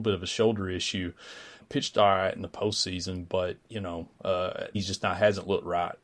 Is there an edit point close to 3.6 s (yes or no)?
yes